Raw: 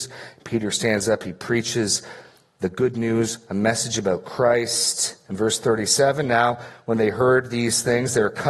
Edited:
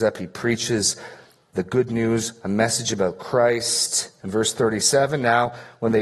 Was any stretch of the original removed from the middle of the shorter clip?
no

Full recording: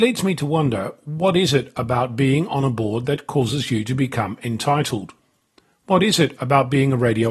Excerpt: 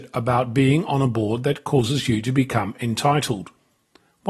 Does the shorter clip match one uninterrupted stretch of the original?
yes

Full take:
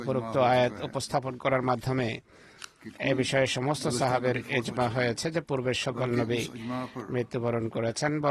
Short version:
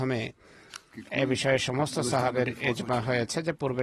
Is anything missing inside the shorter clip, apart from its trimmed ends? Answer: no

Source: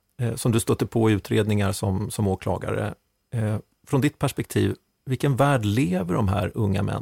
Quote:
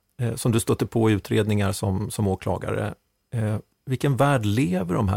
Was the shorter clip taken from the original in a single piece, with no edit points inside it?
no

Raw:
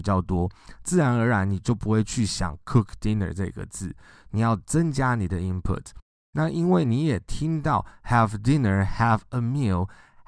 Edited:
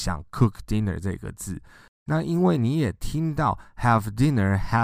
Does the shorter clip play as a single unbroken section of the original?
no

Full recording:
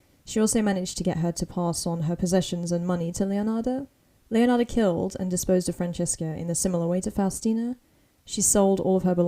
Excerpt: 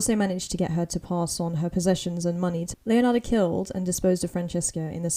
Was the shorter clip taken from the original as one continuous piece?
no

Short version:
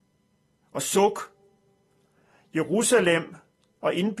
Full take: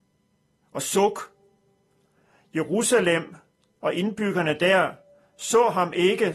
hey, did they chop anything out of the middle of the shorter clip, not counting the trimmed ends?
no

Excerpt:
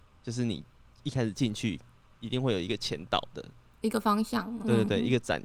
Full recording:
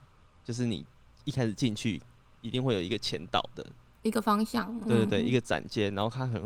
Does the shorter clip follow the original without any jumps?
yes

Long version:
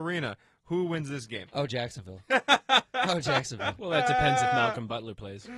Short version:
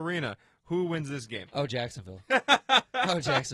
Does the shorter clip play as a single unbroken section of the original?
yes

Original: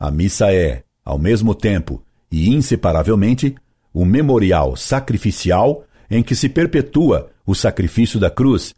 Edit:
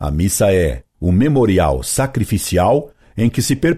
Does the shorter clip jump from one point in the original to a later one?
yes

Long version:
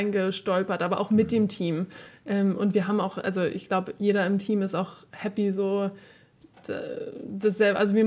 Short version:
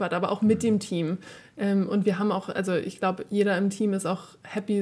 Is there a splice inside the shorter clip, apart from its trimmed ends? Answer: no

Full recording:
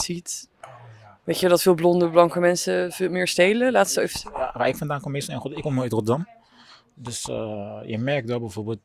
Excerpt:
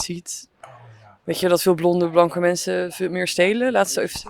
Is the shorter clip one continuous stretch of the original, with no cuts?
yes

